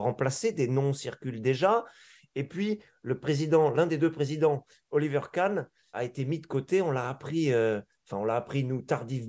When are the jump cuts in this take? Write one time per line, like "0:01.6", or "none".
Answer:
0:05.9